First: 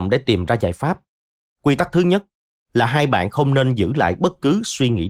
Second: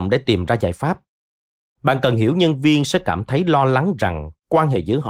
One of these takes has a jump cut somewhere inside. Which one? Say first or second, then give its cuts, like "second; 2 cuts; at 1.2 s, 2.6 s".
first; 1 cut; at 1.5 s